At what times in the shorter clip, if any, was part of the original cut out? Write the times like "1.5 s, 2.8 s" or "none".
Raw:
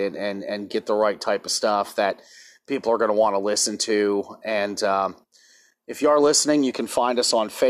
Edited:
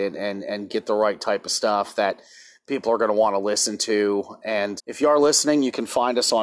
4.8 s